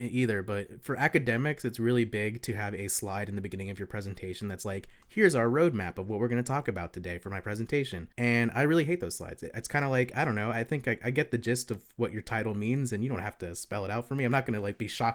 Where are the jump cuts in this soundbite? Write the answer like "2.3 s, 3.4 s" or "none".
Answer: 8.1 s